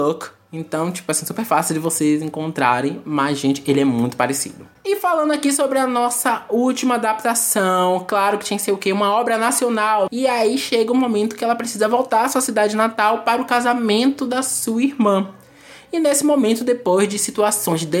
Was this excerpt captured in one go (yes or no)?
no